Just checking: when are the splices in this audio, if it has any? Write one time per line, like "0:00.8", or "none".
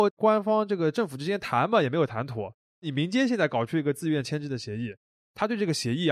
none